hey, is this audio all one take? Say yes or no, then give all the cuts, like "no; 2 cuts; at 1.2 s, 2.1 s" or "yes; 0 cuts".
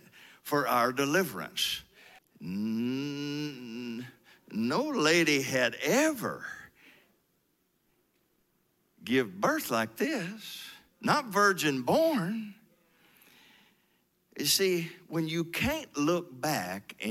no; 1 cut; at 2.2 s